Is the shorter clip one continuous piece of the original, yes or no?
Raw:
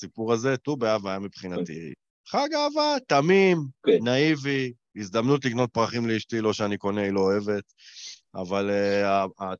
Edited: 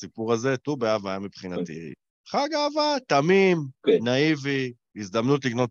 yes